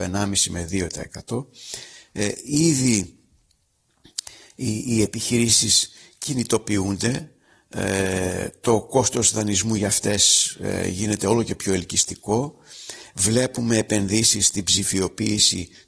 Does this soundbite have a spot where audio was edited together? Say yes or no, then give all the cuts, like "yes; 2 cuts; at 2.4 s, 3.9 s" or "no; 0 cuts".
no; 0 cuts